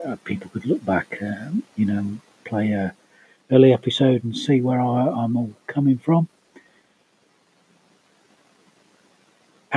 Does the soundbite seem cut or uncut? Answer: uncut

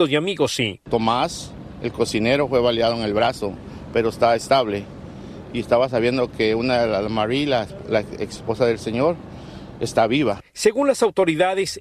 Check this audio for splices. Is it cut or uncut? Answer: uncut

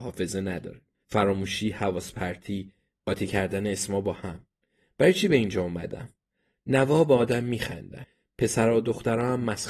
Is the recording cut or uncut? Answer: cut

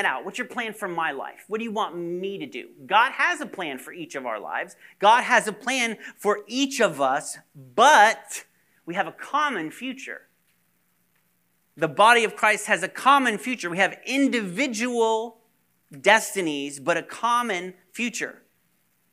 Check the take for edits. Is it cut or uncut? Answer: uncut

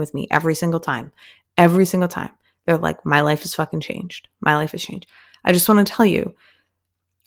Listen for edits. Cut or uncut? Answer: uncut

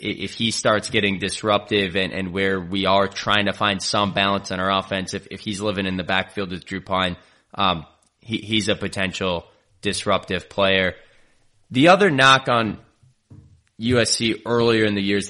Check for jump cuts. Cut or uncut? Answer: uncut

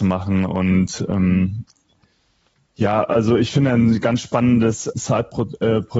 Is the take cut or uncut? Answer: cut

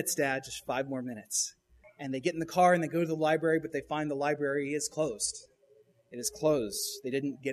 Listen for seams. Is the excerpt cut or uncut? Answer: cut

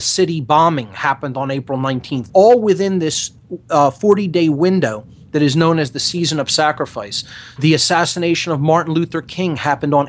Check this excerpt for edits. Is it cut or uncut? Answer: cut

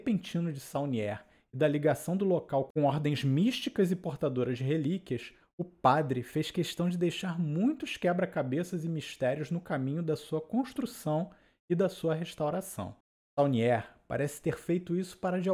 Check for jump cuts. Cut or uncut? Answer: uncut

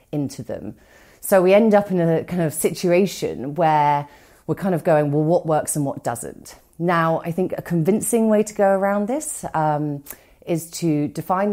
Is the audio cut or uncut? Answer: uncut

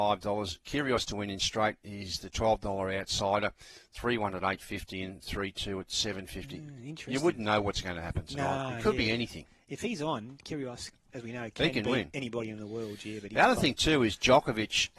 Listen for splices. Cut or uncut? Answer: uncut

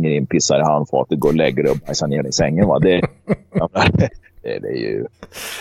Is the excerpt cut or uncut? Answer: uncut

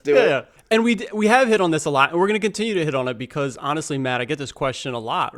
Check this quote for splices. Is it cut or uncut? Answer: uncut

